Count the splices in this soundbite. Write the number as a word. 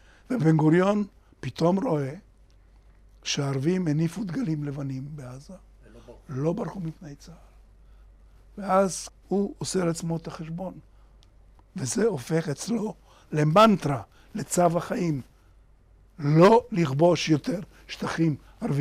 two